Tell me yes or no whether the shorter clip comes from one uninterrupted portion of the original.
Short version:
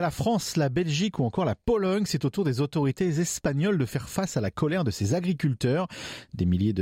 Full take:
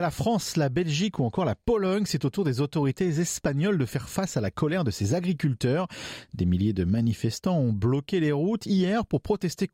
yes